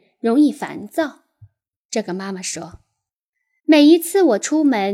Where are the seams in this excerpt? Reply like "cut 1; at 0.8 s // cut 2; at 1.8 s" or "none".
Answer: none